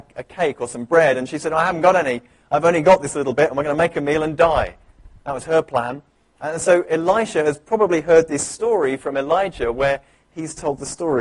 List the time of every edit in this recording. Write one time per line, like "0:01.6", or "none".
none